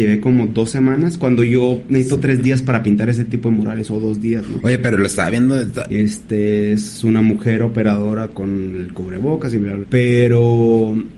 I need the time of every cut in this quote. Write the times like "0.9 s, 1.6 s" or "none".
5.9 s, 9.8 s